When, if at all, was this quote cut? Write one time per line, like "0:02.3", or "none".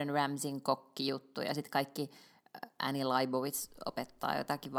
none

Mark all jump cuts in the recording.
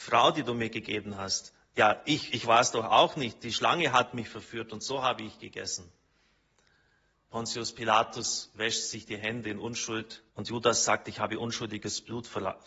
0:07.1
0:10.3

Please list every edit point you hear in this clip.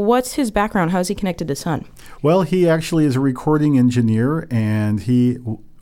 none

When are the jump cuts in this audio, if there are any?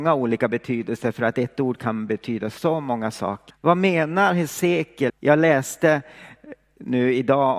0:03.5
0:05.1

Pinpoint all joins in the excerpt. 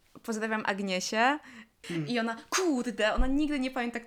0:01.8

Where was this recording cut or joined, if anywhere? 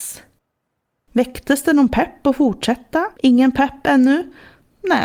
0:03.1

